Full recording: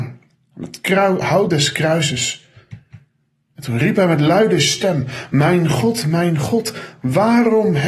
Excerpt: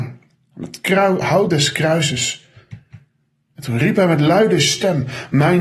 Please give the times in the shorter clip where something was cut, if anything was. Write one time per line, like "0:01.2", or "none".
none